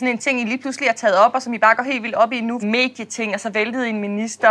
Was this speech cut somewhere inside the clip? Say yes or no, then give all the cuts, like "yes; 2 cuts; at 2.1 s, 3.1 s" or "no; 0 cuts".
yes; 1 cut; at 2.6 s